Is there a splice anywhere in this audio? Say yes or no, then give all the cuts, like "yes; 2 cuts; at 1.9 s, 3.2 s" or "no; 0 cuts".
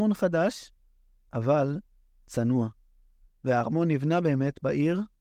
no; 0 cuts